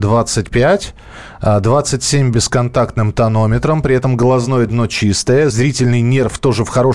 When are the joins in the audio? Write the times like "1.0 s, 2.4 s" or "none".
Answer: none